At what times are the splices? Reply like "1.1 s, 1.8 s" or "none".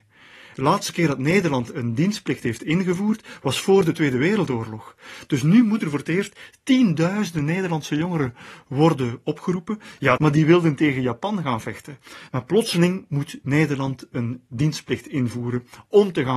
10.2 s, 12.3 s

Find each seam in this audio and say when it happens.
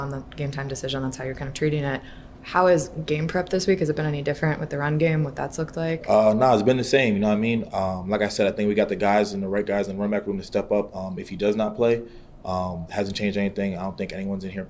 12.9 s

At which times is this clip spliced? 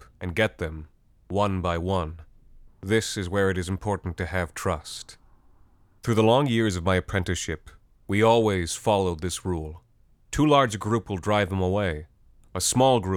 2.7 s, 6.0 s

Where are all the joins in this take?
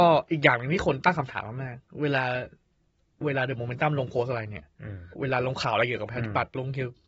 5.1 s

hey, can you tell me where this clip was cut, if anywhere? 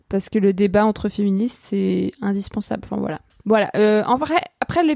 3.4 s

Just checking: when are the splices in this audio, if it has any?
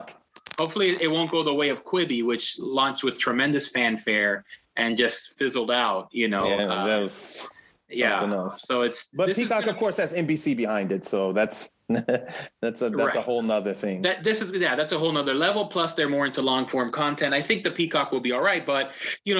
none

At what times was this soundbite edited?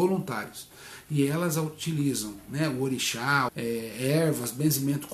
3.5 s

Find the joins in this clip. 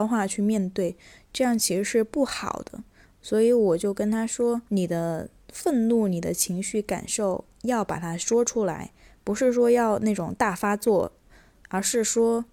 4.7 s

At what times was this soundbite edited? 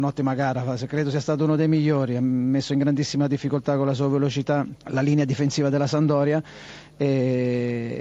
4.8 s

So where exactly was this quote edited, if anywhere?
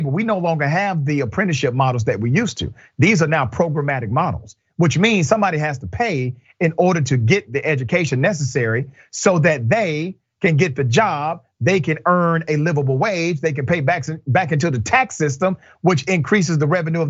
none

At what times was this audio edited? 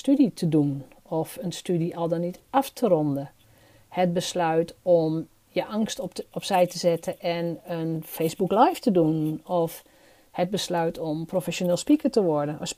none

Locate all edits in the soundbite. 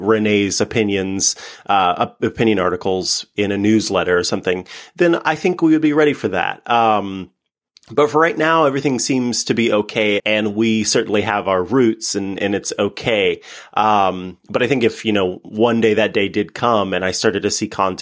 10.2 s

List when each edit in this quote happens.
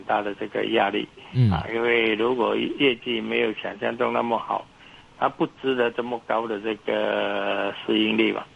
none

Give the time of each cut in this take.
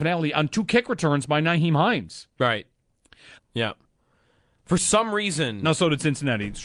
3.4 s

